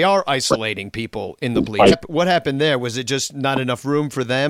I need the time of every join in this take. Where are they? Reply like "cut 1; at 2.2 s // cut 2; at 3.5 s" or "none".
cut 1; at 1.9 s